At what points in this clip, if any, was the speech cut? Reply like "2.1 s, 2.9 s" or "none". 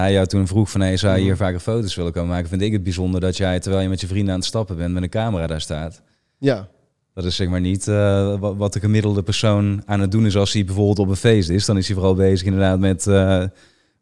none